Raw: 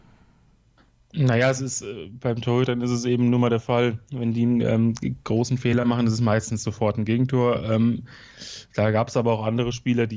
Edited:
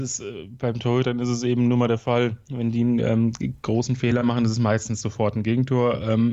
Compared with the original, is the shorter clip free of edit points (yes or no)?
yes